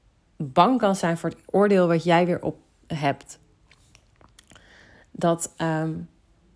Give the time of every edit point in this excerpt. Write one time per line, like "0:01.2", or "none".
0:02.8